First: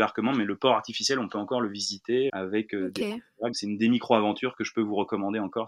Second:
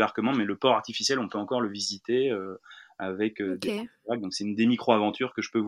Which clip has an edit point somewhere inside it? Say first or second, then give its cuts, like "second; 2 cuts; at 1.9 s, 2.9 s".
first; 2 cuts; at 2.3 s, 3.5 s